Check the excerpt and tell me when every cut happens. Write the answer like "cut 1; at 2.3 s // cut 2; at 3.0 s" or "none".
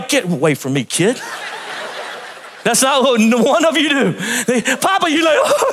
none